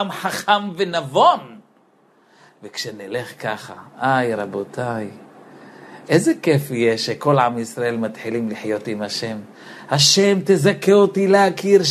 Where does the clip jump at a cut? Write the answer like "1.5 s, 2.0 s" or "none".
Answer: 4.4 s